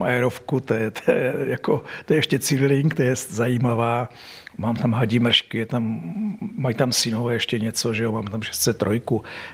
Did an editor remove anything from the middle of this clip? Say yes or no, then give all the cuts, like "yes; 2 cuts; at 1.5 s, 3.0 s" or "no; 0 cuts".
no; 0 cuts